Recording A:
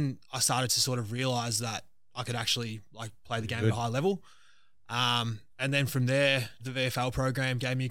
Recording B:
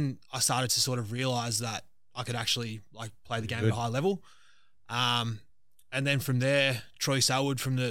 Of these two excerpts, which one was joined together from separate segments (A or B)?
A